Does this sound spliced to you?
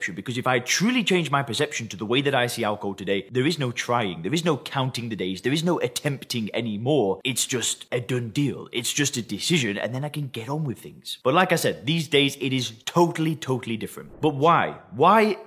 no; 0 cuts

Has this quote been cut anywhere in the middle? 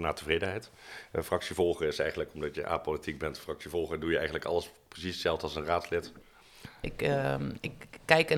yes; 1 cut; at 6.8 s

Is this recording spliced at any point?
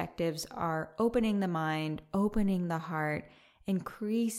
no; 0 cuts

